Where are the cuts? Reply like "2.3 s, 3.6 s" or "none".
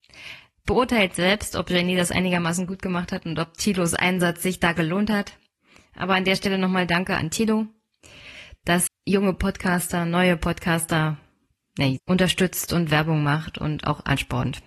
8.9 s, 12.0 s